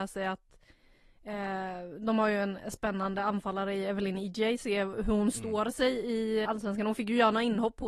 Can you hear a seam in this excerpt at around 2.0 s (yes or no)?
no